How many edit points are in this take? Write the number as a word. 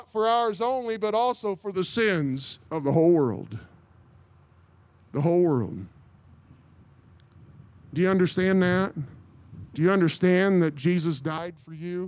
two